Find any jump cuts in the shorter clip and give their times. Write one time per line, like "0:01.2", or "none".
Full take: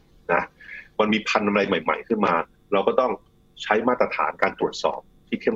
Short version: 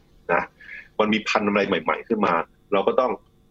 none